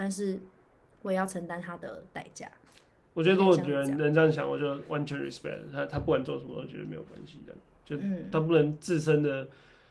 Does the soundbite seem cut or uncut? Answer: uncut